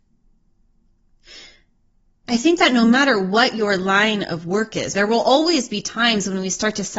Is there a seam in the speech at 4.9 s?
yes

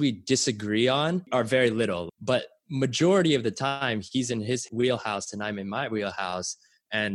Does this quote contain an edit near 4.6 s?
no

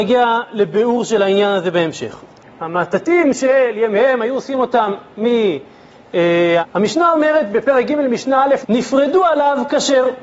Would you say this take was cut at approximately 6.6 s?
yes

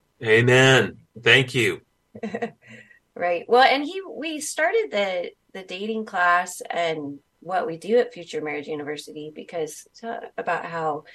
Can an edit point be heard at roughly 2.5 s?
no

